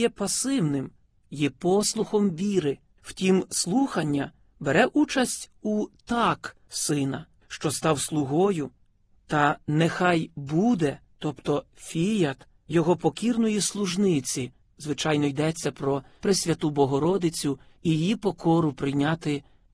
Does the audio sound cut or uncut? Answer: cut